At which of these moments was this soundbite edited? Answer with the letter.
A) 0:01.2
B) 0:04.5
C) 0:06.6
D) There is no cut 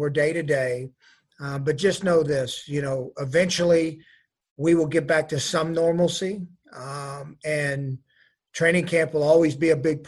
D